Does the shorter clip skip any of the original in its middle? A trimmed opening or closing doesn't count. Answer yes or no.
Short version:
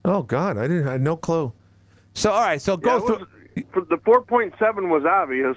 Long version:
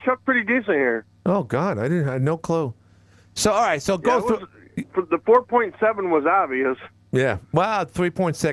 no